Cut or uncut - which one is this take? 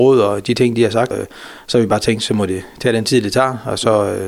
cut